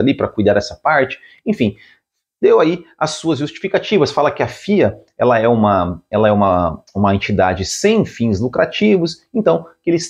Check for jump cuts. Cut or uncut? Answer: uncut